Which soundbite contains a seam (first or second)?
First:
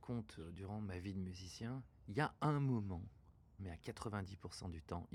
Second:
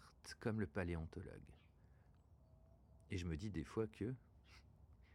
first